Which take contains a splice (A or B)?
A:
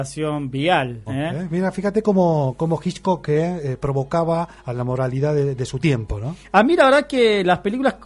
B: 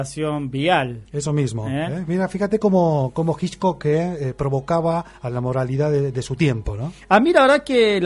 A